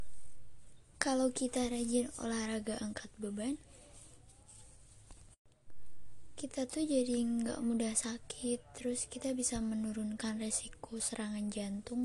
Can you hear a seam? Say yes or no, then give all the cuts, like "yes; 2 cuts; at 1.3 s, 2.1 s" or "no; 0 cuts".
yes; 1 cut; at 0.9 s